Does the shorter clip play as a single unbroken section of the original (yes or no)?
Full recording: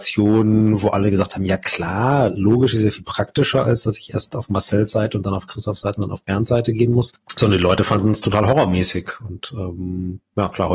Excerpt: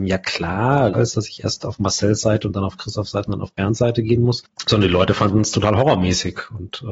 no